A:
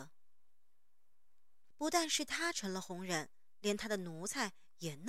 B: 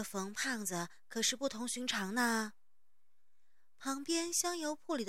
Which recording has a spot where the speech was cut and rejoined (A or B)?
A